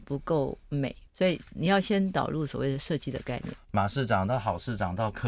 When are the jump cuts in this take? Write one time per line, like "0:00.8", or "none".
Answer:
0:01.1
0:03.6